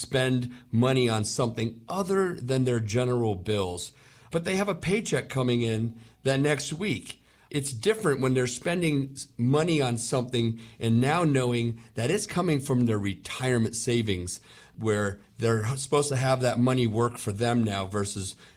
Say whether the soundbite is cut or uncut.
uncut